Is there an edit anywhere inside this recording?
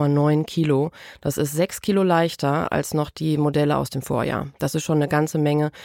no; 0 cuts

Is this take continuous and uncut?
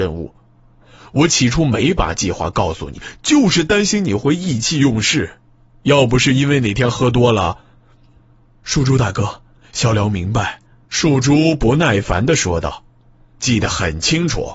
no; 2 cuts; at 10.8 s, 12.9 s

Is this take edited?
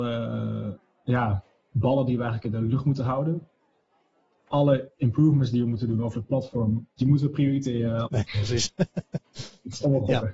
yes; 2 cuts; at 7.0 s, 8.1 s

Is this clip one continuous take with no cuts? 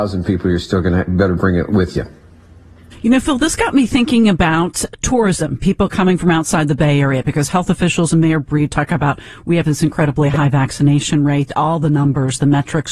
yes; 0 cuts

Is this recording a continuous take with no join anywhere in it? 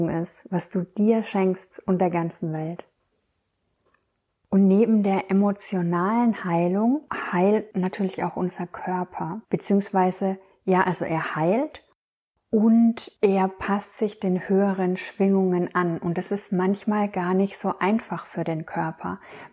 yes; 0 cuts

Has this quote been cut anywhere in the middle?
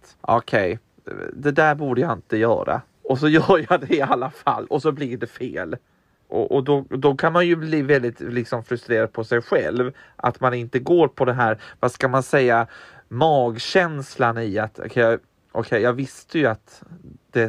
no; 0 cuts

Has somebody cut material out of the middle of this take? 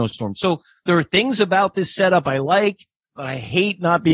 no; 0 cuts

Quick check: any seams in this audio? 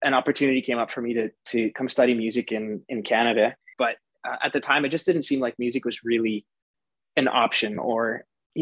yes; 1 cut; at 3.7 s

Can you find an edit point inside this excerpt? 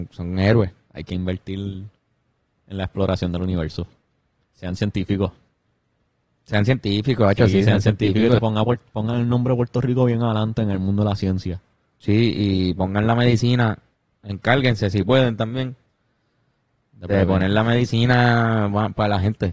yes; 1 cut; at 8.4 s

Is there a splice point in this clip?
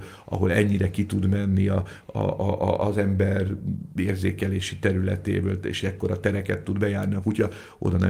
no; 0 cuts

